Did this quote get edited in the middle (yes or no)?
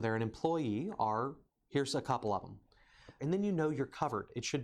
yes